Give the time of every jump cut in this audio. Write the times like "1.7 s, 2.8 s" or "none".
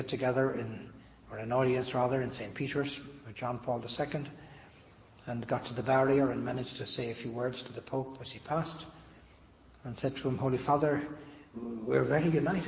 11.5 s